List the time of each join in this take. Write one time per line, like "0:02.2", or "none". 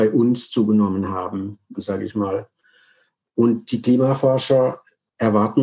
0:01.7